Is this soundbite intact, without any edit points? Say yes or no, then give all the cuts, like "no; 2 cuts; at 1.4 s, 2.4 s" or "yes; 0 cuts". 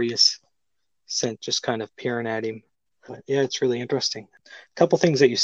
no; 1 cut; at 3.1 s